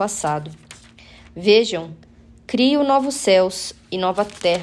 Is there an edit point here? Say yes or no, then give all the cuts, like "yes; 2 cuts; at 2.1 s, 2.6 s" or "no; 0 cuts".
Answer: no; 0 cuts